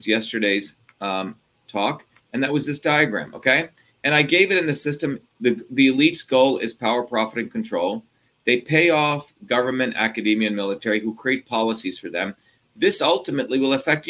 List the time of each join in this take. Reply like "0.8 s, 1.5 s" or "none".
none